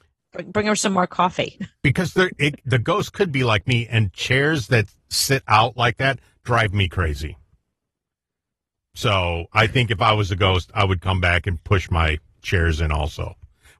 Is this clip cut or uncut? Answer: uncut